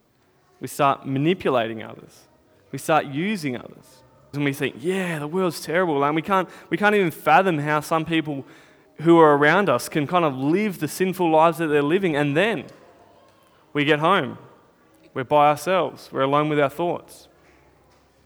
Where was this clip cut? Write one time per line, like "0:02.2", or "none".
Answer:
0:04.3